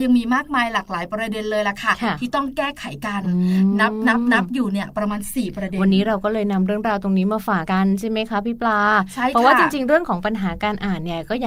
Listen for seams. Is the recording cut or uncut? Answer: cut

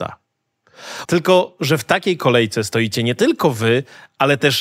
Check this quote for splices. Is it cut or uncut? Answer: cut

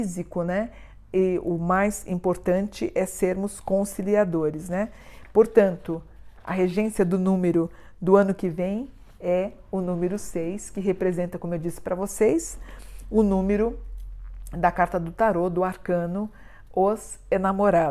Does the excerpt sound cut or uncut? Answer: uncut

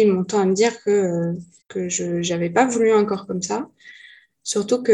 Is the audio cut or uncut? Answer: cut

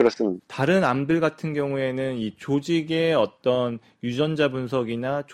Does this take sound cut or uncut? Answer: uncut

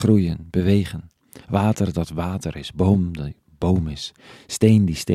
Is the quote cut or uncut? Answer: uncut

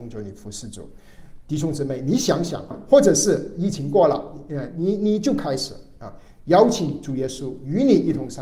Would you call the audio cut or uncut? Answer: cut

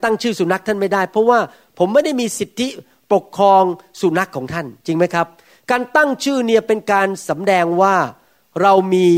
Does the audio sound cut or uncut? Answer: uncut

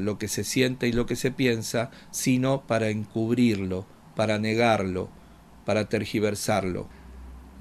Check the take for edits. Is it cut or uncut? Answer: uncut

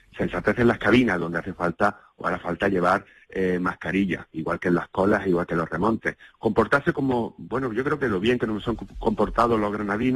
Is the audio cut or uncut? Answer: uncut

